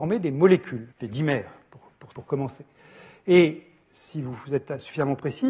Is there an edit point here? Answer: yes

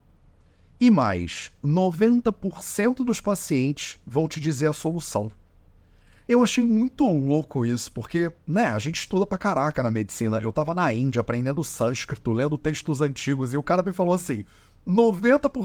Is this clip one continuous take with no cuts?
yes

